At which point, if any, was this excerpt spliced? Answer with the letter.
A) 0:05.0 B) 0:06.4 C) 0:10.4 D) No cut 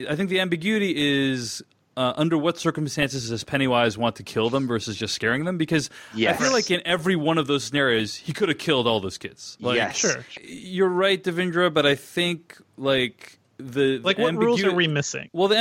C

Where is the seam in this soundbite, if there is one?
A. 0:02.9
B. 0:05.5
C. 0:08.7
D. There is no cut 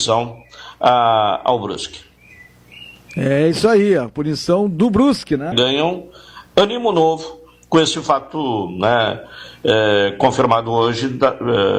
B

